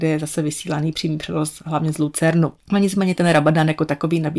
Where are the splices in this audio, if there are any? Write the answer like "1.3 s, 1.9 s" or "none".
2.6 s